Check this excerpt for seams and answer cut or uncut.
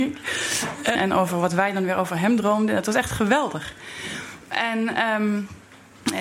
cut